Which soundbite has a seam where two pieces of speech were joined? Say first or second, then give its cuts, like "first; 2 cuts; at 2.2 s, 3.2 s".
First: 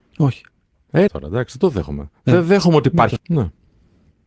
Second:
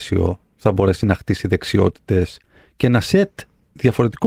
first; 2 cuts; at 1.1 s, 3.2 s